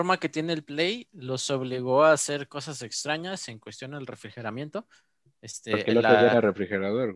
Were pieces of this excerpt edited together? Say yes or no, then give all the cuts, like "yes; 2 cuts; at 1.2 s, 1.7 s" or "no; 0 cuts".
no; 0 cuts